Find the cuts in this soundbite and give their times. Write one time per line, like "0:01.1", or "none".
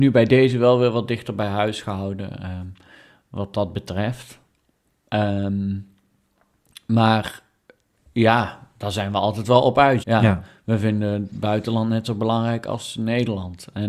0:10.0